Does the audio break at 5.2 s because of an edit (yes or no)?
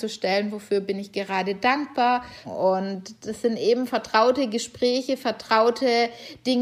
no